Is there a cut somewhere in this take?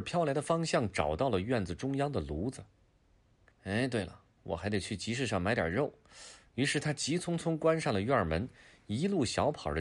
yes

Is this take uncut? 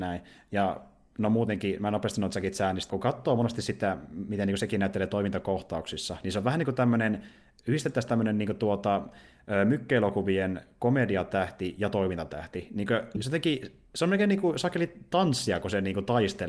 no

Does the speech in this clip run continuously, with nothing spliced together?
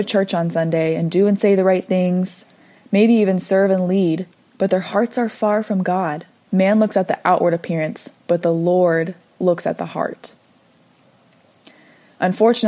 no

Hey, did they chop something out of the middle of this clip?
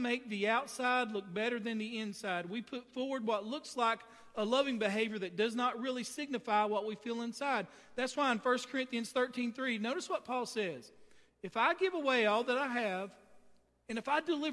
no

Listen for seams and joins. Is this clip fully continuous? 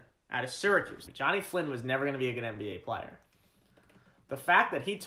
no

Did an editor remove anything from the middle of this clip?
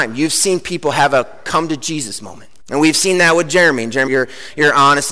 yes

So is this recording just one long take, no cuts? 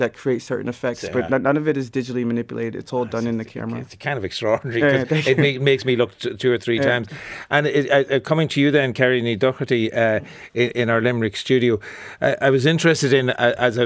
yes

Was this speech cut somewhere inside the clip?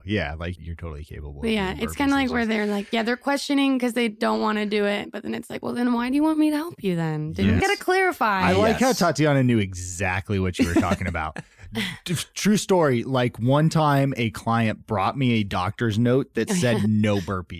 yes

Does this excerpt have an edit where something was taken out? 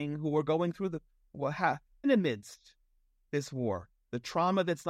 yes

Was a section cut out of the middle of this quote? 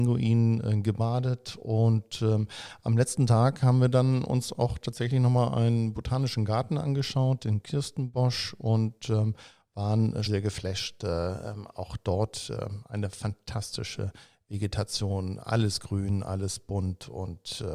yes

